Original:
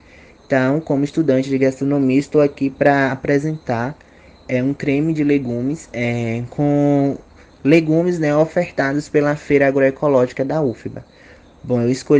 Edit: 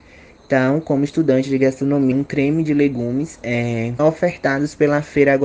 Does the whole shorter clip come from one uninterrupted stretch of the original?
no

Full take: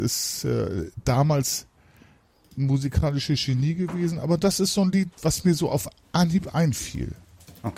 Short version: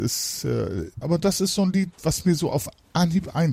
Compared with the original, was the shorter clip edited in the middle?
yes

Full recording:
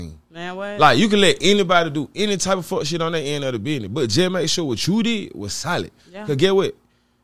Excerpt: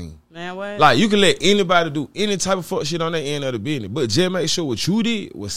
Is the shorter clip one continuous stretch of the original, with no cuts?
yes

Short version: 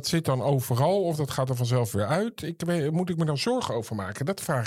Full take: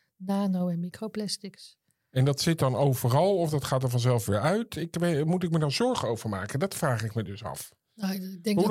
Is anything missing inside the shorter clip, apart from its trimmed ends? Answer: no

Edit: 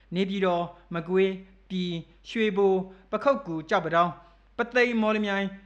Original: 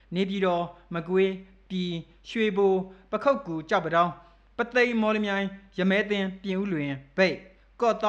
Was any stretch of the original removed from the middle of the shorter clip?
no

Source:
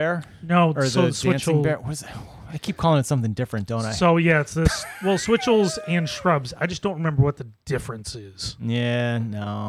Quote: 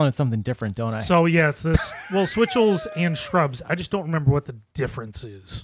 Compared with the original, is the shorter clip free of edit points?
yes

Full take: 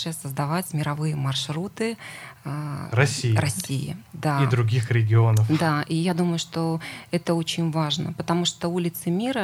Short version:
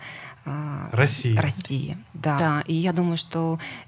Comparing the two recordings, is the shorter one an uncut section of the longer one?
no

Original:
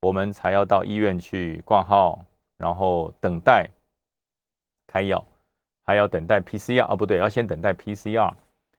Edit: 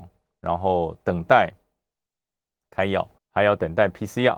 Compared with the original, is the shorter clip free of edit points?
no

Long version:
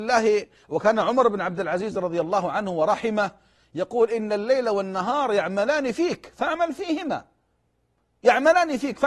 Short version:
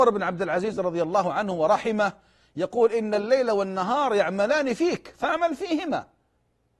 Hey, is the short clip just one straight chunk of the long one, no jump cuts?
yes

